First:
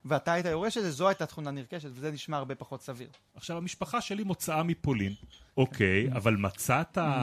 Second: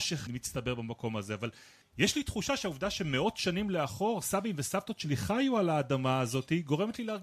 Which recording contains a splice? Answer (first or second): first